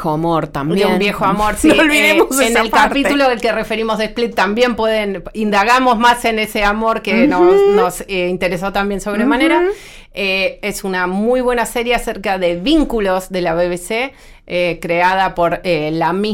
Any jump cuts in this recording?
no; 0 cuts

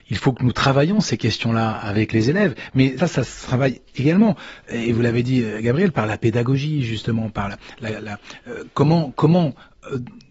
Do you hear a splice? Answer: yes; 1 cut; at 3.0 s

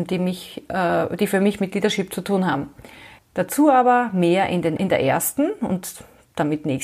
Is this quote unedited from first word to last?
no; 2 cuts; at 3.2 s, 4.8 s

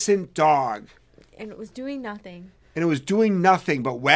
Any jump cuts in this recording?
no; 0 cuts

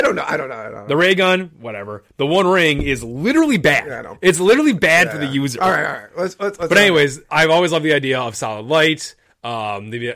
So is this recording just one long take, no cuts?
yes; 0 cuts

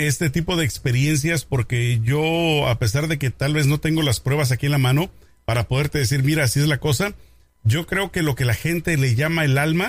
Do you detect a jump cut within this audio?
no; 0 cuts

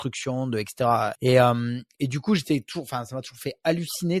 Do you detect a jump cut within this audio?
yes; 1 cut; at 1.1 s

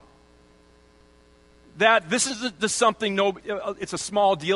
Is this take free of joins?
no; 1 cut; at 3.4 s

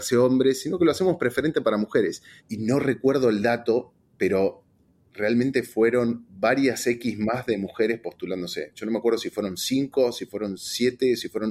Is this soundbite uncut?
yes; 0 cuts

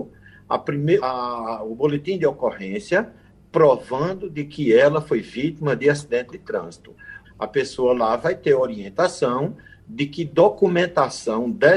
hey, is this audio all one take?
no; 2 cuts; at 1.0 s, 7.2 s

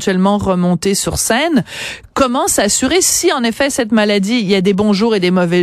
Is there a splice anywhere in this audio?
no; 0 cuts

